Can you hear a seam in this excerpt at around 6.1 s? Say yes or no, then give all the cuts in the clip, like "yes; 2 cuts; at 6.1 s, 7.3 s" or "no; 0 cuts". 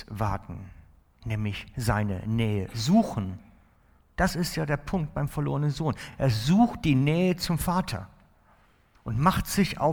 no; 0 cuts